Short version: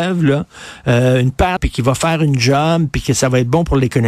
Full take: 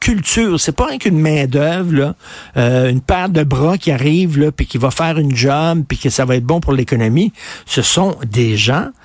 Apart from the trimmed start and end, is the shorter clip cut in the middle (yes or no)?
yes